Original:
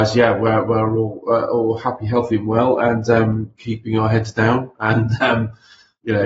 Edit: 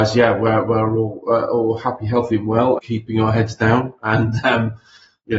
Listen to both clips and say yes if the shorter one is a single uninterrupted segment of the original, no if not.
no